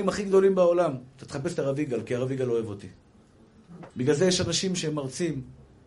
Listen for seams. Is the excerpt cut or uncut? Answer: cut